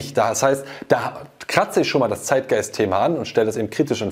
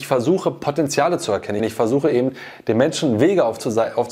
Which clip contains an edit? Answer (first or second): second